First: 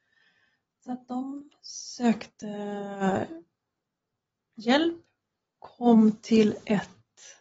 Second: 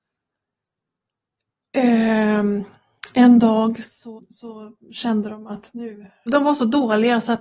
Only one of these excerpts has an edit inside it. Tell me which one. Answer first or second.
second